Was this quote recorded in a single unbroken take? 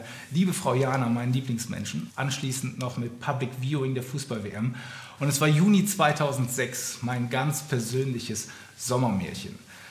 no; 2 cuts; at 2.1 s, 5.2 s

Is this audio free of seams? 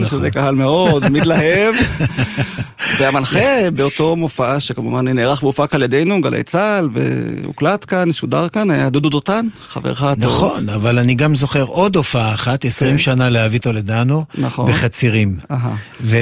yes; 0 cuts

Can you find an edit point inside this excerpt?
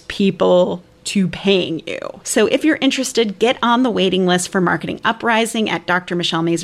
yes; 1 cut; at 2.2 s

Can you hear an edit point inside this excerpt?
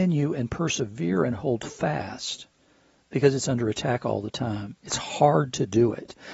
no; 0 cuts

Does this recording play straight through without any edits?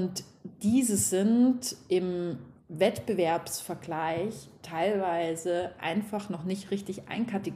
yes; 0 cuts

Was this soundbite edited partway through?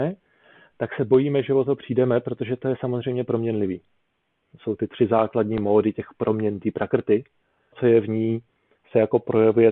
yes; 2 cuts; at 4.5 s, 7.7 s

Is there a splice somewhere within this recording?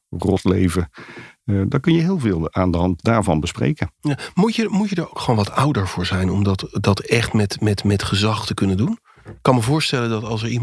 no; 0 cuts

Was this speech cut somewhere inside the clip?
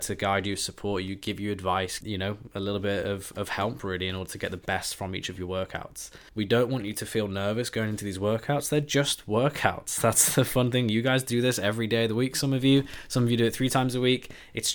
yes; 2 cuts; at 2.0 s, 6.3 s

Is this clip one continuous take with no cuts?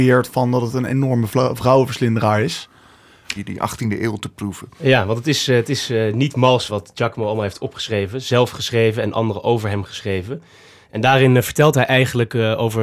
no; 3 cuts; at 3.4 s, 6.7 s, 10.8 s

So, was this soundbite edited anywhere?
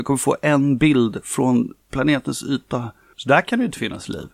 yes; 1 cut; at 3.1 s

